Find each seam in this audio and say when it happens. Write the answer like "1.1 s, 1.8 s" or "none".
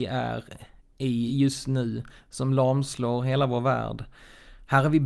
none